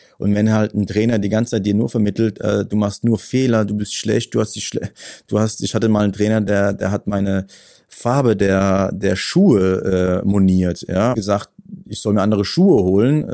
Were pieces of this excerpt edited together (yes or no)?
yes